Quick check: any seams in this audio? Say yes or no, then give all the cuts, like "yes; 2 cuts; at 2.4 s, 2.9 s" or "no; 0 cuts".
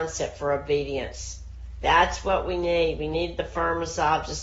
no; 0 cuts